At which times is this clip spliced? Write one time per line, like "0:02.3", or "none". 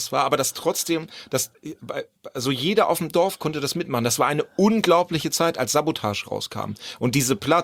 none